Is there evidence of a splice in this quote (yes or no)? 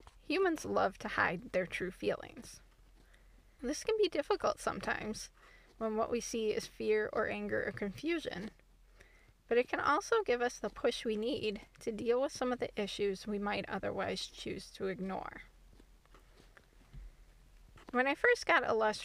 yes